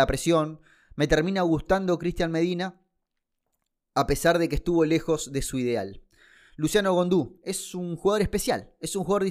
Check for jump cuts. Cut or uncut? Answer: uncut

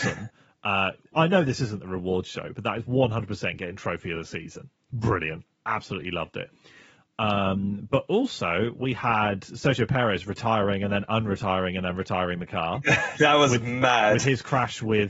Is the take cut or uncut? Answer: uncut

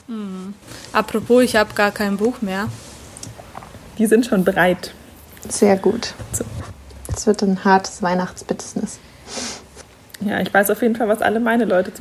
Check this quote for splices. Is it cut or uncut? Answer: cut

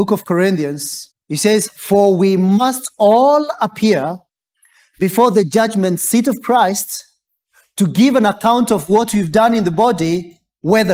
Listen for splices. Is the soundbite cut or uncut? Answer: cut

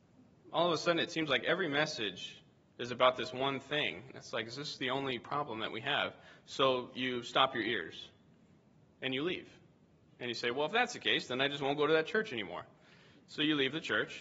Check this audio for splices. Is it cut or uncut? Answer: uncut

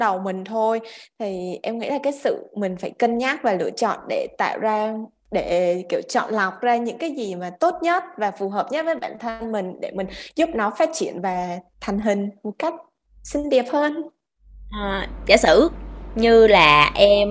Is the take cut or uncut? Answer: uncut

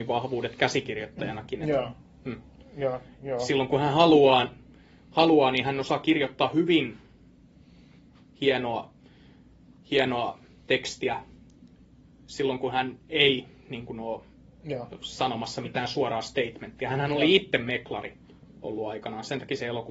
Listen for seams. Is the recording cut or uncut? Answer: uncut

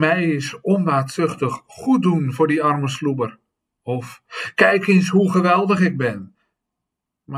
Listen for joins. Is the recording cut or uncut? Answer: uncut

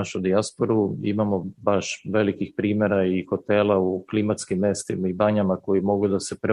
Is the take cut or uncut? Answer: uncut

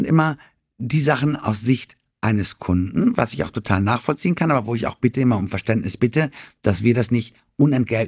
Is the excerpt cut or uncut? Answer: uncut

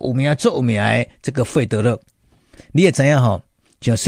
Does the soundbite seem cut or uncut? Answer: cut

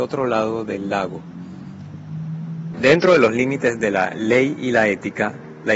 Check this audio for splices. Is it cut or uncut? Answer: cut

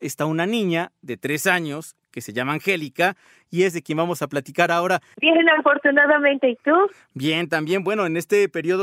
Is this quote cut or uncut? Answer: cut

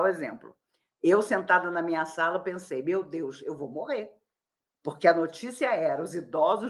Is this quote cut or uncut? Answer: uncut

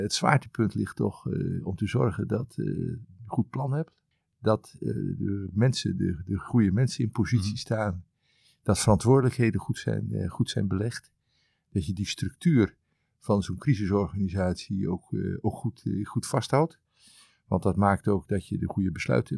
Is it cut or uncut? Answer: uncut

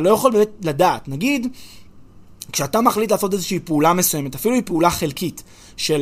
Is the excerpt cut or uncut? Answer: uncut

